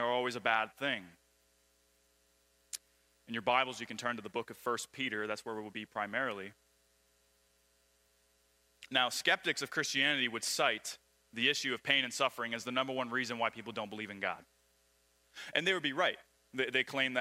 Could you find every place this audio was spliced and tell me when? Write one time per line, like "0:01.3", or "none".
none